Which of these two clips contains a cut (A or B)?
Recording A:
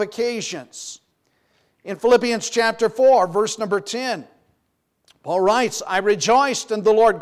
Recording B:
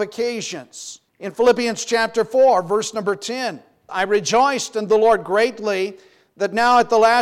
B